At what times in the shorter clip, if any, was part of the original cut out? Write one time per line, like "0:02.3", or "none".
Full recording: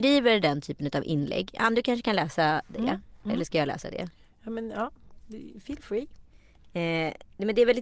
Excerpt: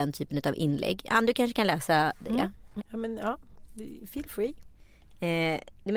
0:02.8